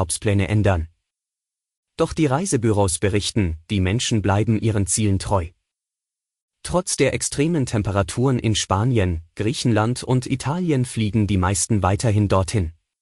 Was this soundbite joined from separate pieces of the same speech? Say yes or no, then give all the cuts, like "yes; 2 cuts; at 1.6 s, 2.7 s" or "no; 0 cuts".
no; 0 cuts